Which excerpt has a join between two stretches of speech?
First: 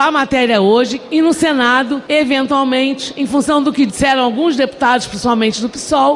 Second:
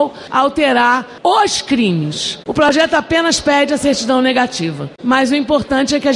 second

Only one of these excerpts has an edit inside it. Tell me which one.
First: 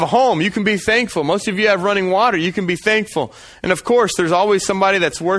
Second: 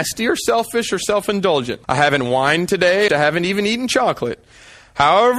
second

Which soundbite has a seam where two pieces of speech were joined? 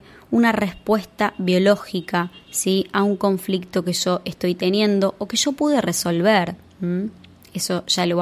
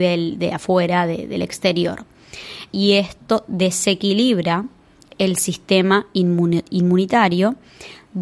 second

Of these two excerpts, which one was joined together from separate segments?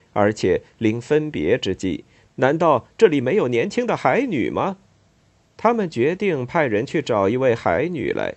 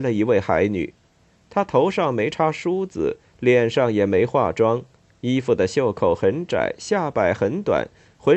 first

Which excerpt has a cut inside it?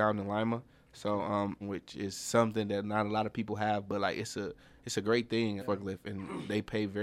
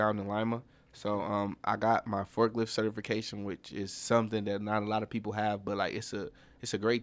first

